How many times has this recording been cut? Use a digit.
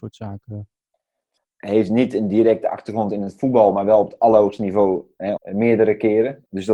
2